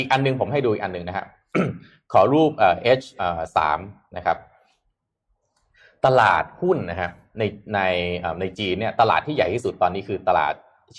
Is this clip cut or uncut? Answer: uncut